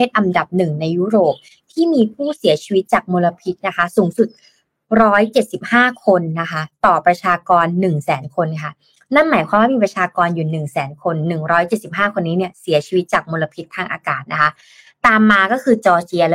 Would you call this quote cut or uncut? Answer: uncut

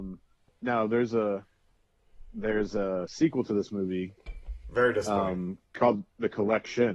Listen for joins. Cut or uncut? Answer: uncut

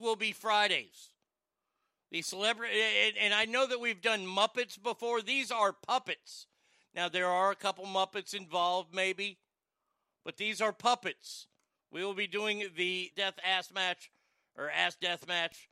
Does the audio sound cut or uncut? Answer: cut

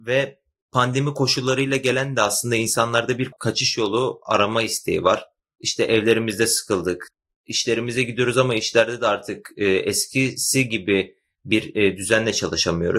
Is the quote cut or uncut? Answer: uncut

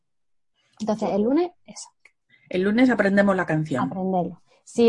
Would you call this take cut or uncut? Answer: uncut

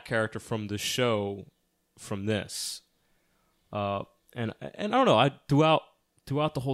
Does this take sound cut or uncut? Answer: uncut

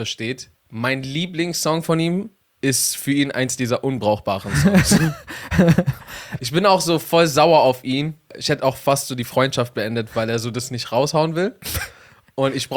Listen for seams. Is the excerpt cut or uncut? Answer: cut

